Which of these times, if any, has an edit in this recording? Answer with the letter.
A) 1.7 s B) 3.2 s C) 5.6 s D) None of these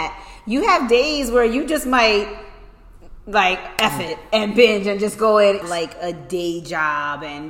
C